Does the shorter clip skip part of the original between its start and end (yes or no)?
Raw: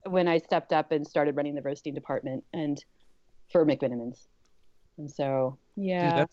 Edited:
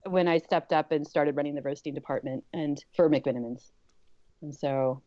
yes